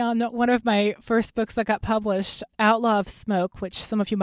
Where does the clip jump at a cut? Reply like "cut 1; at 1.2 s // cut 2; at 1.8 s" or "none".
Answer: cut 1; at 2.5 s